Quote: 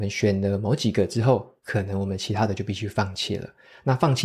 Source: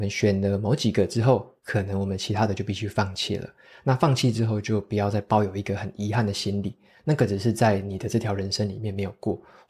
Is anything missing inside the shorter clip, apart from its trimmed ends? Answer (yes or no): no